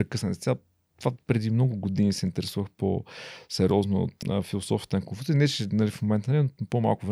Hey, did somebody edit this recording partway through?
yes; 1 cut; at 4.2 s

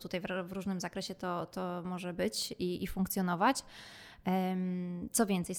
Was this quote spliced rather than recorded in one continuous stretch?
no; 0 cuts

